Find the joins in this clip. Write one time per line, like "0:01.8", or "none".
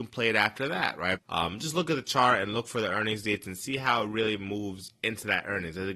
0:01.1